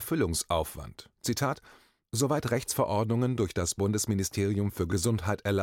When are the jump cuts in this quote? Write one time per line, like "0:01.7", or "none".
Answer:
none

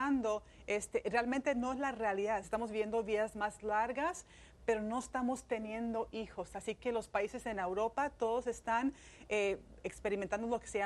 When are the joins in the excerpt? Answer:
0:02.4

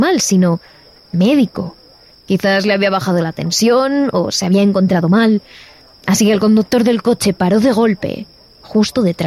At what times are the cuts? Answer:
none

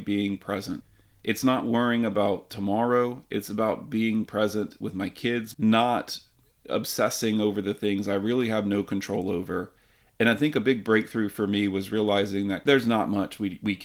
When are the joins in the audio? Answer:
0:05.5

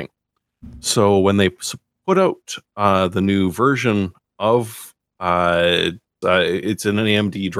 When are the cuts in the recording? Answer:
0:06.2

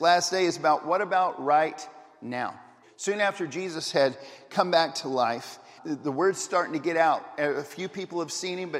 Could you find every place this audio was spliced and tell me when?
0:02.8
0:05.8

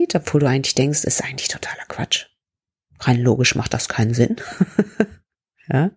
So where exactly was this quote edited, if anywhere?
none

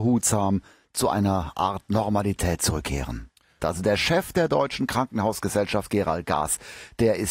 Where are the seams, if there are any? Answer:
0:03.6

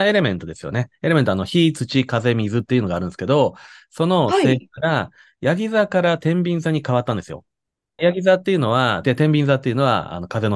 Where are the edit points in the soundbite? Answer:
0:08.0
0:09.0

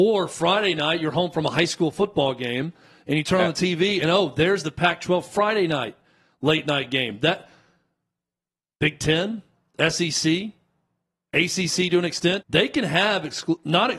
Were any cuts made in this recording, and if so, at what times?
0:12.4

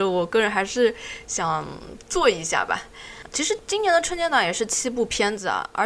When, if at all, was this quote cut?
0:03.2

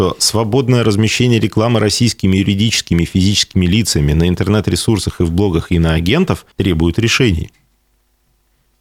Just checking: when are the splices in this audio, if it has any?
0:06.5

